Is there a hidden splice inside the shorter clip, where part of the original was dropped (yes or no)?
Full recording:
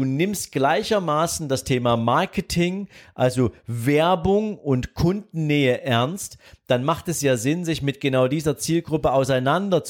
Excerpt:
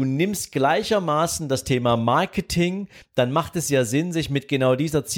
yes